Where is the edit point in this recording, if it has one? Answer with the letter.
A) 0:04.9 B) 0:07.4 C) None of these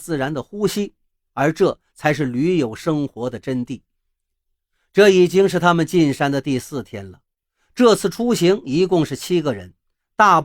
C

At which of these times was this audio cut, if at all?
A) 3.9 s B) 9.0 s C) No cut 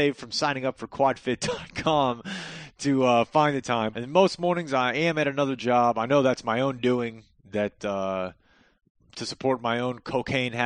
A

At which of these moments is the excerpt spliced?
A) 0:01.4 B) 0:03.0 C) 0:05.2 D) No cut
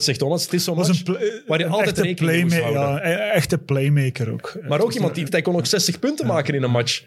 C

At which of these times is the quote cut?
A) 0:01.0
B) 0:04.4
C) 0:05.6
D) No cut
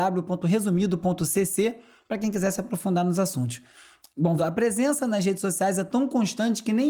B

